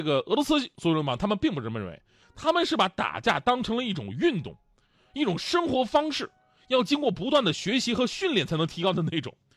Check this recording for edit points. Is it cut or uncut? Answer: uncut